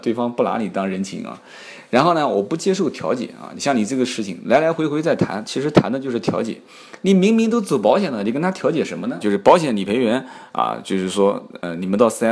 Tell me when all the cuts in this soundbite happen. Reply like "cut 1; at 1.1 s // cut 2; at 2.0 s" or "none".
cut 1; at 9.2 s